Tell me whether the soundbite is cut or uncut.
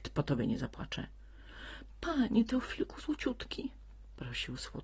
uncut